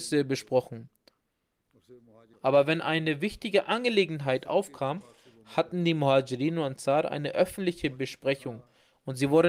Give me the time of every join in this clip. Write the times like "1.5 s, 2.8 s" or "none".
2.3 s